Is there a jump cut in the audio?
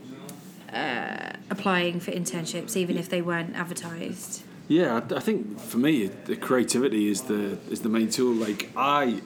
no; 0 cuts

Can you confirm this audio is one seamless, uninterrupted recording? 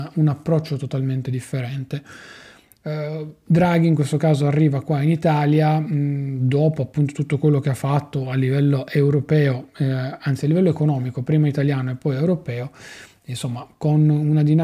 yes; 0 cuts

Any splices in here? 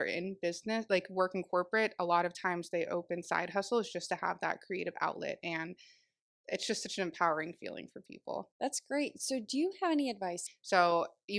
yes; 2 cuts; at 8.5 s, 10.5 s

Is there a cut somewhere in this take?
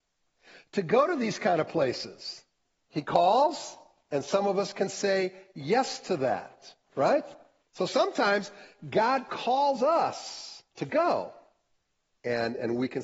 yes; 2 cuts; at 7.6 s, 10.7 s

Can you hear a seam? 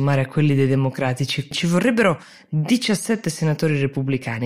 yes; 1 cut; at 1.5 s

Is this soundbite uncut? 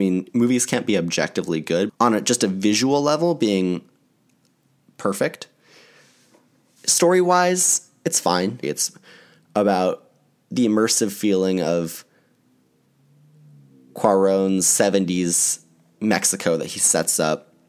no; 2 cuts; at 1.9 s, 8.6 s

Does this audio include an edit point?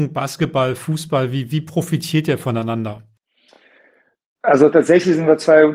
no; 0 cuts

